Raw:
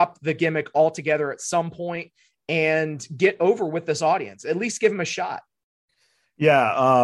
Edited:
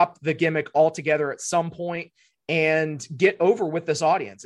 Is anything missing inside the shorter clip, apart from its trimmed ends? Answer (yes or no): no